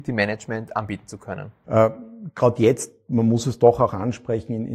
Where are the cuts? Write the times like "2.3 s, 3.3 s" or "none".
1.6 s